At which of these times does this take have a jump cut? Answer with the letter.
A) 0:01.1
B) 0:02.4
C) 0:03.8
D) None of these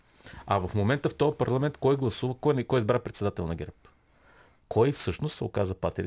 D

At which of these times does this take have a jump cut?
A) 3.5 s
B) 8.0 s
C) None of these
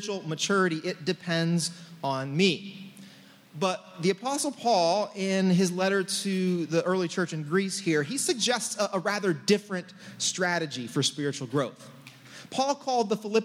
A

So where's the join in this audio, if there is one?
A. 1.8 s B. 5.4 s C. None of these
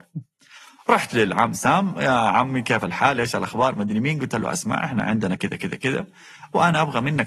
B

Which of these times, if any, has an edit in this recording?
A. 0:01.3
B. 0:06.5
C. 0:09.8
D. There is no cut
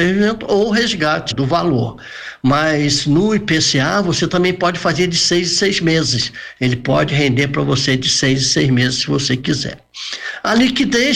A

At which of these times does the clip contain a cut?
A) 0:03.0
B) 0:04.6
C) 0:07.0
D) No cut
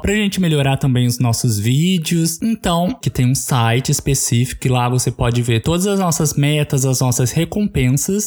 A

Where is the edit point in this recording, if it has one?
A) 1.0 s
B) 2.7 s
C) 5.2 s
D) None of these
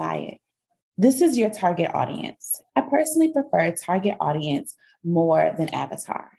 B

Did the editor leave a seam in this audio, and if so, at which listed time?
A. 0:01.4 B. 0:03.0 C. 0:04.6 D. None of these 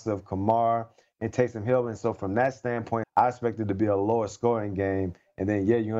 B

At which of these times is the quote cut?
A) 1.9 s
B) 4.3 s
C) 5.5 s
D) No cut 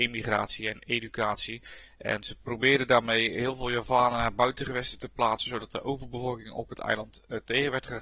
D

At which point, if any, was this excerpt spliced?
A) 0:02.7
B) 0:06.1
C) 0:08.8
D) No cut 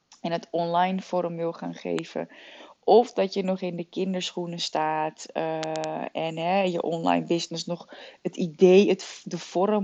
B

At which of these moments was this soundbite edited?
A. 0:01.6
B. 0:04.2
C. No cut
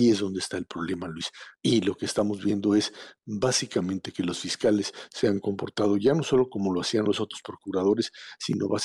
A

